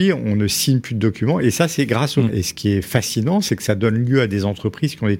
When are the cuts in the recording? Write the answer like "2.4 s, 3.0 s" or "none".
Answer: 2.3 s